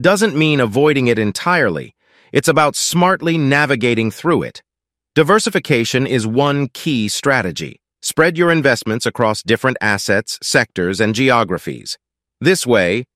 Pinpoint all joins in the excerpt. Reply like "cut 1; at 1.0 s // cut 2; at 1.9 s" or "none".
cut 1; at 8.0 s